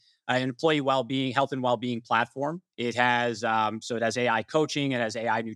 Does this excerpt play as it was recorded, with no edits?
no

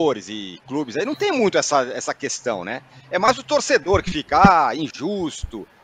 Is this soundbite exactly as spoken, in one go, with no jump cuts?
yes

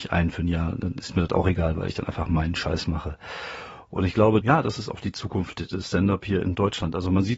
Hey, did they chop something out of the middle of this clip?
yes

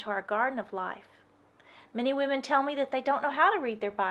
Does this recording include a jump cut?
no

